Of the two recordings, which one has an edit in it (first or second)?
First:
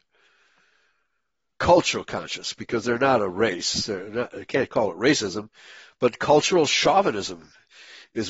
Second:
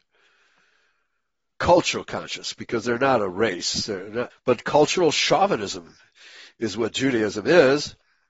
second